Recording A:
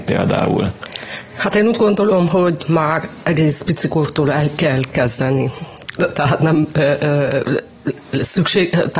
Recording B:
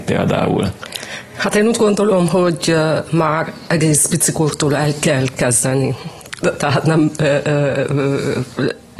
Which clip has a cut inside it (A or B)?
A